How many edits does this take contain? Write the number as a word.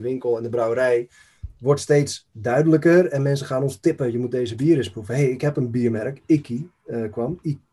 zero